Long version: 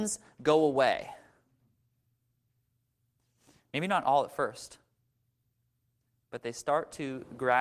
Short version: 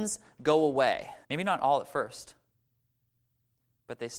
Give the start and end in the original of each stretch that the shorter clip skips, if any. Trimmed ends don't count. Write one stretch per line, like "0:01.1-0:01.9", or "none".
0:01.2-0:03.7